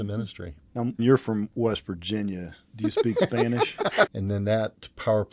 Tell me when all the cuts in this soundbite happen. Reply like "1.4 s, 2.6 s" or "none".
1.0 s, 4.1 s